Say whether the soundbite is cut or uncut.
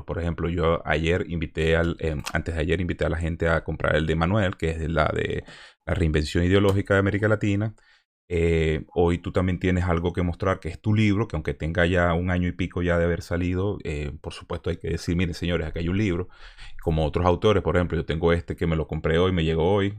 uncut